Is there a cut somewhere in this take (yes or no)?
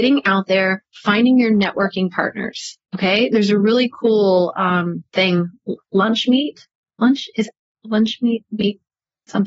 no